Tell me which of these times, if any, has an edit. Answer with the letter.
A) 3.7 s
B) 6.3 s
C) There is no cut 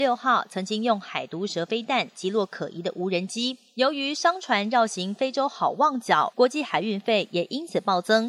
B